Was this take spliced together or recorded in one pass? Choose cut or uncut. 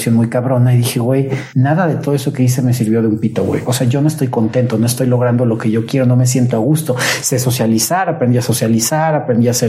uncut